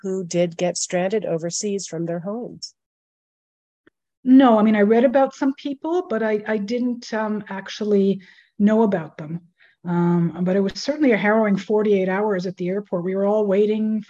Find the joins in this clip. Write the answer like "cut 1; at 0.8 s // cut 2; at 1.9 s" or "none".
none